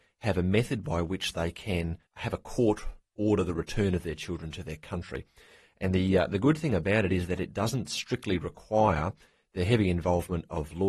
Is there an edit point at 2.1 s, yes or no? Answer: yes